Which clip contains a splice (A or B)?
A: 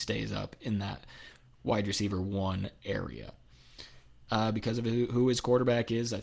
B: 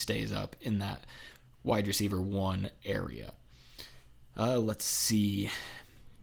A